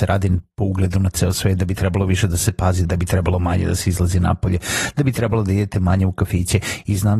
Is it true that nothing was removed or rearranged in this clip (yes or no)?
no